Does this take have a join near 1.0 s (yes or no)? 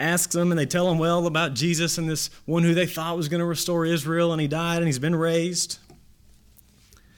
no